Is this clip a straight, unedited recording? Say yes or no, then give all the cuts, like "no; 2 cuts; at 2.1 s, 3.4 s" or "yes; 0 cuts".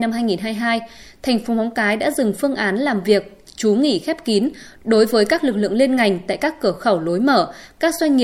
yes; 0 cuts